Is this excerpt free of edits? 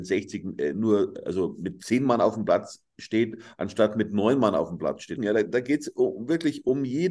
no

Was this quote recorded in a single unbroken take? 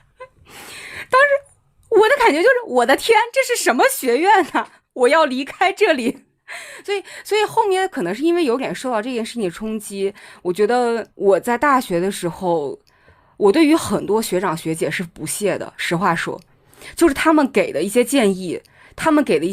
no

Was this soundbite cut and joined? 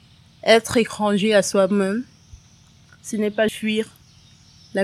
yes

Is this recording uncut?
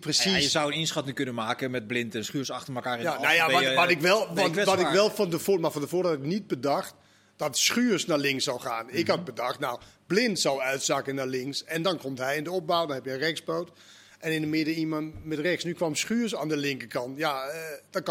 yes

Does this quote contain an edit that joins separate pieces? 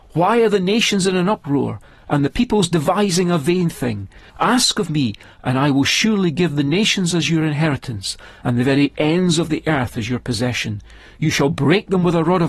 yes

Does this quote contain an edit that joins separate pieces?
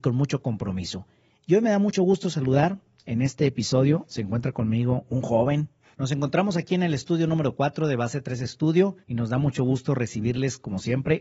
yes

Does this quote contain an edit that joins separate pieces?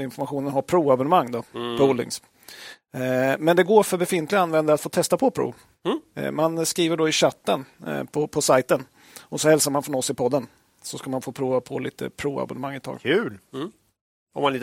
no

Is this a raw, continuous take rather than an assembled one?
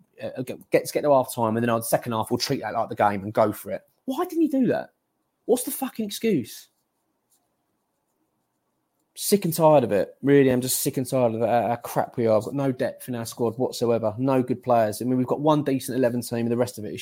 yes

